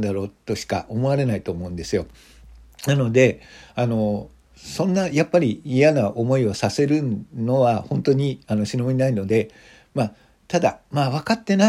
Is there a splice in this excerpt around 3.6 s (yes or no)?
no